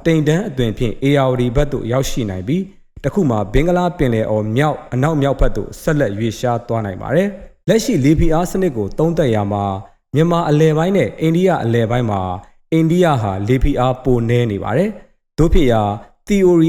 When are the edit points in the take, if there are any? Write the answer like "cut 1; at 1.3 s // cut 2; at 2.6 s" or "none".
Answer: cut 1; at 7.6 s